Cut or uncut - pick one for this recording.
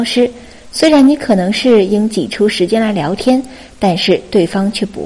uncut